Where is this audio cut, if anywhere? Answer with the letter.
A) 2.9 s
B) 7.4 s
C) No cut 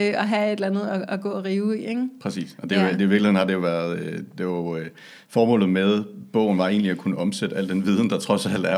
C